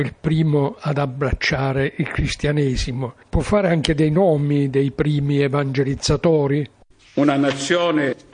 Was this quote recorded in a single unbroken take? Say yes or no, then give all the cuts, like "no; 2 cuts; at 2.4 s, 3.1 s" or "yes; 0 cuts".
yes; 0 cuts